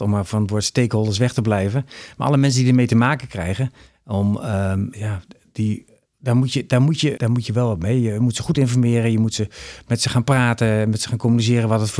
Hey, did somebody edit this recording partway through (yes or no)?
yes